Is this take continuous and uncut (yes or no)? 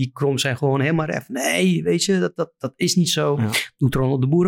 yes